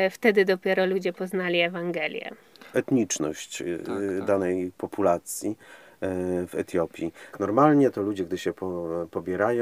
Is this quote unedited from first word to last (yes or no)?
no